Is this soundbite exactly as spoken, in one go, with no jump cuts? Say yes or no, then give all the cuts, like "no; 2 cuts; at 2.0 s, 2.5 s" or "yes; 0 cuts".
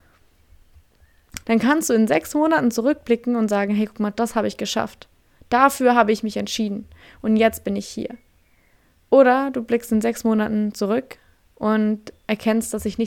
no; 1 cut; at 1.4 s